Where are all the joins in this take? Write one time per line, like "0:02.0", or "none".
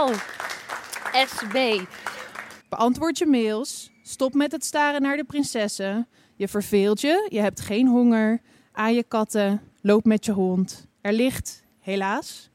0:02.6